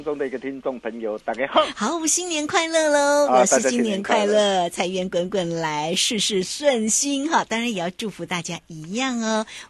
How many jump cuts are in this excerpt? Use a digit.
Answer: 0